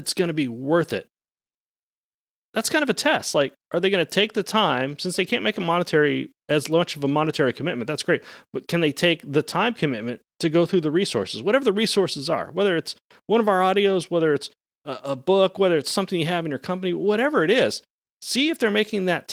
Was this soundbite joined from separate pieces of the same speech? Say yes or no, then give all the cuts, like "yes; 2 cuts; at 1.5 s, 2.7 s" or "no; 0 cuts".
no; 0 cuts